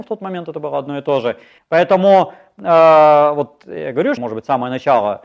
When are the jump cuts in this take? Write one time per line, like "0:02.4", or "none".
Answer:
0:01.6
0:04.2

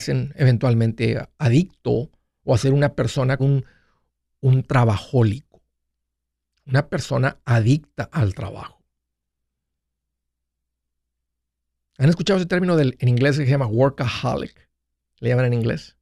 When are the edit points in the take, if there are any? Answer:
0:03.4

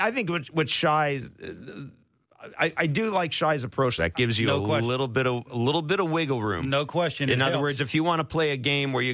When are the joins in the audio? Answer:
0:04.0

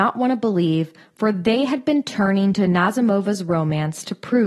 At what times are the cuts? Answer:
none

